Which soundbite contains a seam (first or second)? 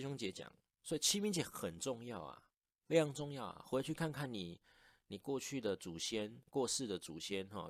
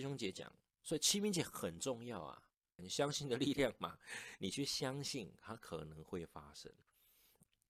second